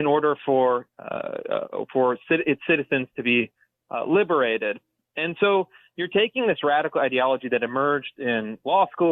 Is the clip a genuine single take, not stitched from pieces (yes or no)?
yes